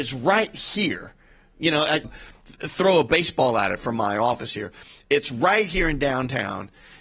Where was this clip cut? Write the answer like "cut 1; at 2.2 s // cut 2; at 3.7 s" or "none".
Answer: cut 1; at 2.0 s